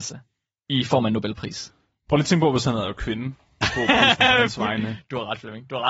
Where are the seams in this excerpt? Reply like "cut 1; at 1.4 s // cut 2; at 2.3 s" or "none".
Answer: cut 1; at 3.6 s